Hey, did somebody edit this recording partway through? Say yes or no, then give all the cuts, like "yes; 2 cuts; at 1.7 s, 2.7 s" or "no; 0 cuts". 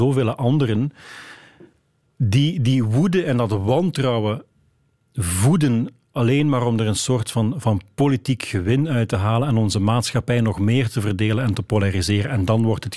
no; 0 cuts